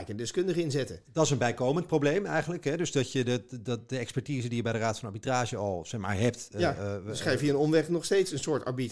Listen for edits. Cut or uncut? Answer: uncut